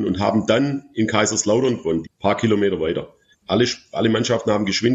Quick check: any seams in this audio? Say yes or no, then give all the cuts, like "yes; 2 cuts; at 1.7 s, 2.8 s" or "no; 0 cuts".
yes; 2 cuts; at 2.0 s, 3.3 s